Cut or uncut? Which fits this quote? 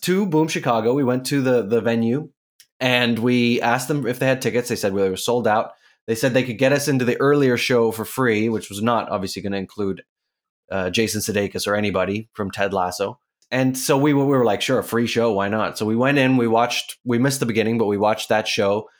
uncut